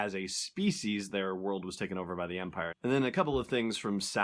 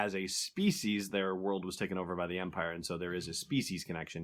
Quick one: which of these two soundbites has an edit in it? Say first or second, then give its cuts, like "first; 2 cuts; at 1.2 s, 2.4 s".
first; 1 cut; at 2.7 s